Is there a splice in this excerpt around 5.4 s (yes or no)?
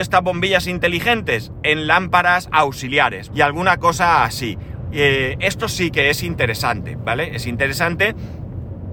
no